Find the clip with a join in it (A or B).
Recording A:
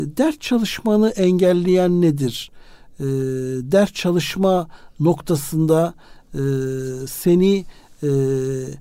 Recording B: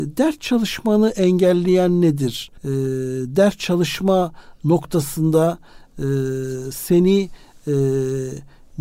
B